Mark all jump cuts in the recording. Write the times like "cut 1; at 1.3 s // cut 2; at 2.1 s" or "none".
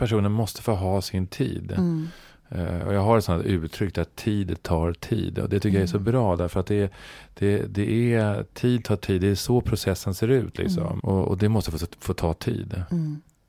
cut 1; at 11.0 s